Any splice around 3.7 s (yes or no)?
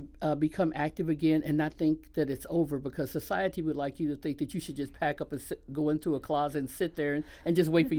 no